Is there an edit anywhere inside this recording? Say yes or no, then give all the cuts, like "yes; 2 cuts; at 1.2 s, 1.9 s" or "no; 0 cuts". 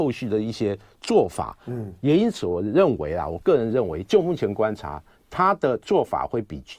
no; 0 cuts